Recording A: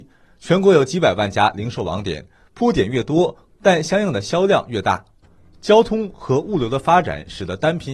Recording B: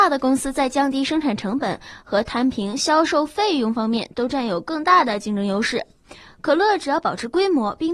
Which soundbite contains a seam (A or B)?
A